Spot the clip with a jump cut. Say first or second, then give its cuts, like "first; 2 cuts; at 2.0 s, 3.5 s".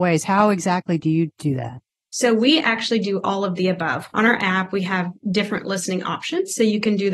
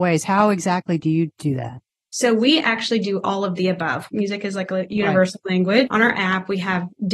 second; 2 cuts; at 4.1 s, 5.9 s